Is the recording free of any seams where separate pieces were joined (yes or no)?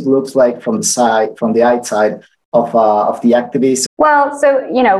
no